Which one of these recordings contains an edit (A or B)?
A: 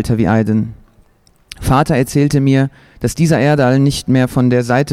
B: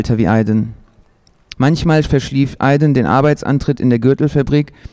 B